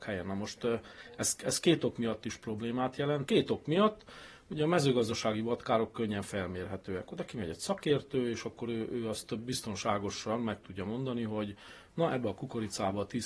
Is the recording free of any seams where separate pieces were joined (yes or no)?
no